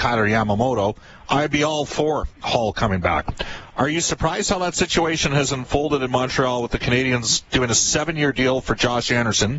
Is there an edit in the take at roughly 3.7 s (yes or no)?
yes